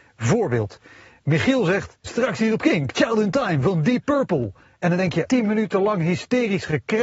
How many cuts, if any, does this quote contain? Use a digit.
2